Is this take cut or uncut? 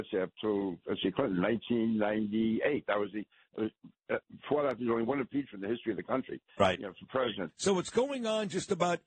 cut